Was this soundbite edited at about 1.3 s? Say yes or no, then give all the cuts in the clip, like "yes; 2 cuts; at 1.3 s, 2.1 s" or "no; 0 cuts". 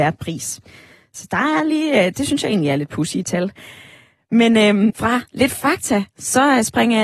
no; 1 cut; at 4.9 s